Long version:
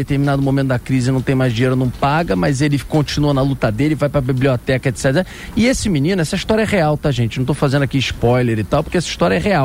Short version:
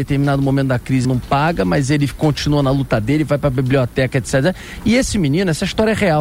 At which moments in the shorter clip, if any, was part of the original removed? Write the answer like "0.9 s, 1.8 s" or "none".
1.0 s

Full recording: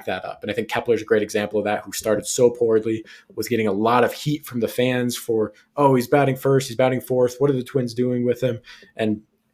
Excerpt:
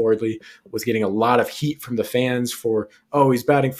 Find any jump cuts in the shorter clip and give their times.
none

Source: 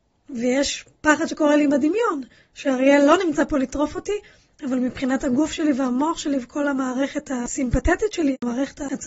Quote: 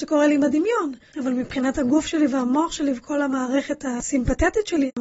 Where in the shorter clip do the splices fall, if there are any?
1.1 s

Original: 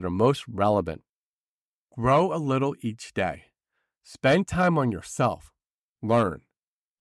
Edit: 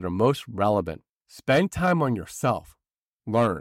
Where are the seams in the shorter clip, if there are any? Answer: 1.2 s

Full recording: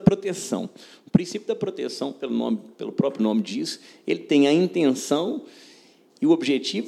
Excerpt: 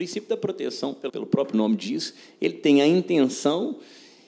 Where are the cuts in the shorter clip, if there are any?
1.1 s

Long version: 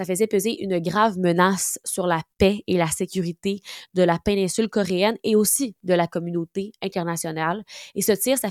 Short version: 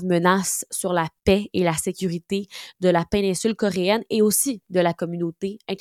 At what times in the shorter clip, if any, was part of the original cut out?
none

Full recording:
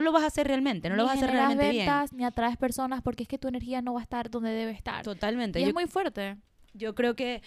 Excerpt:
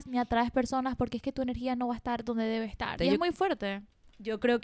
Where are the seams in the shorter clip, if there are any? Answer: 3.0 s

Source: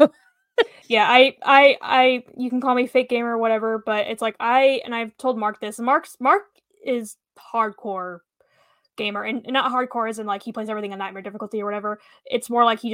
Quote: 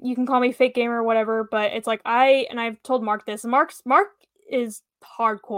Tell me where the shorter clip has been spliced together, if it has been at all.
none

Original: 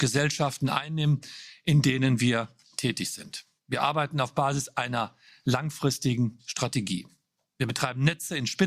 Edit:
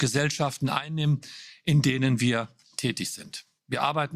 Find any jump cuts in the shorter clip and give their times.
none

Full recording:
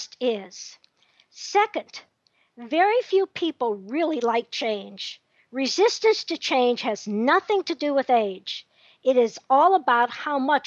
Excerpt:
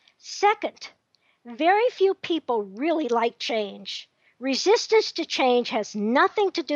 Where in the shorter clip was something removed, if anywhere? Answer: none

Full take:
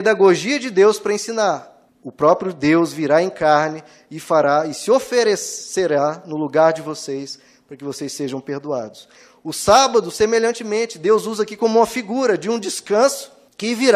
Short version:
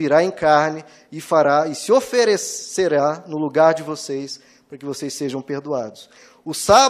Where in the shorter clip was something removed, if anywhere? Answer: none

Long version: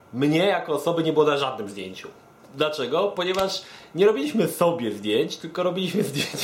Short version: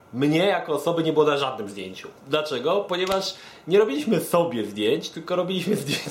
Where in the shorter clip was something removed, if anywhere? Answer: 2.2 s

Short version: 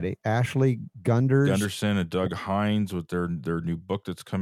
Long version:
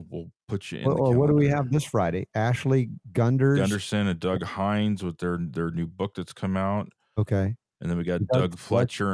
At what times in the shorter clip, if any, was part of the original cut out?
none

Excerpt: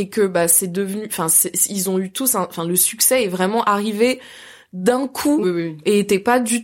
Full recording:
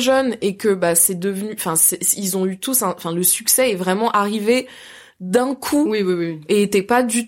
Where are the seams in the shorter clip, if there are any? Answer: 5.4 s

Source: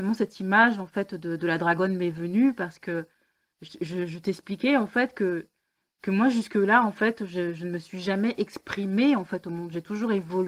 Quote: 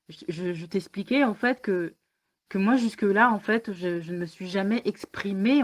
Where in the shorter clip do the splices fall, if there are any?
none

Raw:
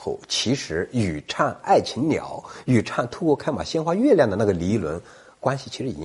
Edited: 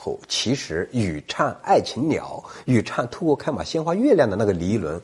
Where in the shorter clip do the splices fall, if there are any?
none

